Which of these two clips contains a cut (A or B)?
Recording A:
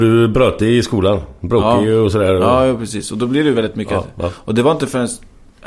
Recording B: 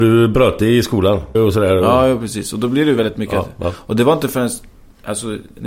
B